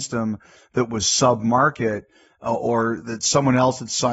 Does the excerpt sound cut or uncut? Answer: uncut